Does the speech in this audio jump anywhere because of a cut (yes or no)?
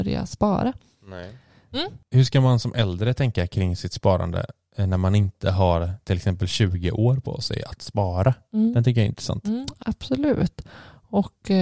yes